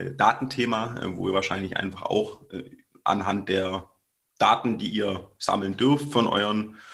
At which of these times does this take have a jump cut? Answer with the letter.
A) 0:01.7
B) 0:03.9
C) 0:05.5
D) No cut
D